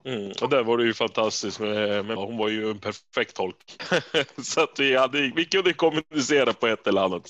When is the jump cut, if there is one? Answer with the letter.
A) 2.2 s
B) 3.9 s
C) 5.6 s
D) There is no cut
A